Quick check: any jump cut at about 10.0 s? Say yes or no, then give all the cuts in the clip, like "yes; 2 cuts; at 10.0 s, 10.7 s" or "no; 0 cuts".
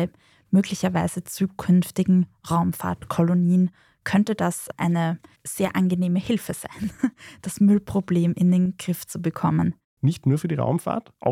yes; 1 cut; at 10.0 s